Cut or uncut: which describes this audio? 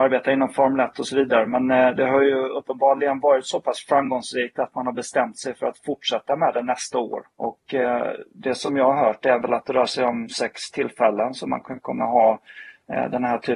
cut